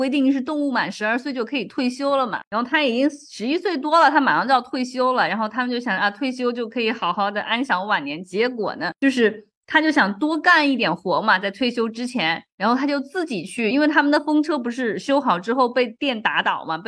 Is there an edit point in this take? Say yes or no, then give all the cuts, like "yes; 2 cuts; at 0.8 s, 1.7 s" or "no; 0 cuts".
no; 0 cuts